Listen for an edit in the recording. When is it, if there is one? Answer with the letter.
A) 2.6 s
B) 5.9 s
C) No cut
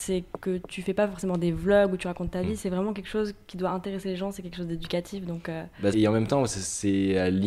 B